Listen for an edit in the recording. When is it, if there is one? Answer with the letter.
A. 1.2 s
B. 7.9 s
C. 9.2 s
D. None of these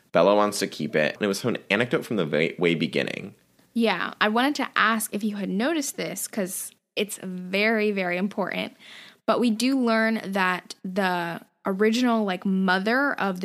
A